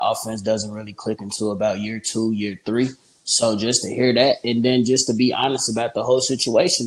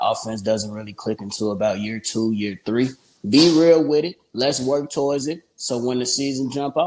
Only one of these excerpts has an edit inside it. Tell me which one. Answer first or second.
second